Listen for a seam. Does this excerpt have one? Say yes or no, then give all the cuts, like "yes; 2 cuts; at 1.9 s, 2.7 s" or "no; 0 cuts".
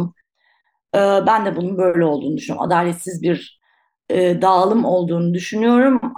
no; 0 cuts